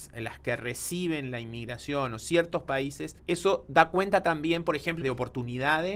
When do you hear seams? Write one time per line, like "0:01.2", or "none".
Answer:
0:03.2
0:05.0